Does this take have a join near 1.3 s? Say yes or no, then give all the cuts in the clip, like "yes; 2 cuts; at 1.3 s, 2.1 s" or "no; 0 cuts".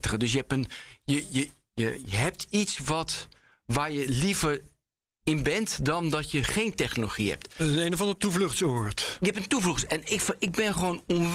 no; 0 cuts